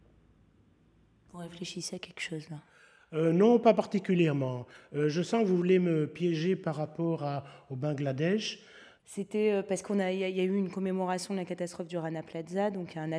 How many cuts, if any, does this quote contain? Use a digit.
0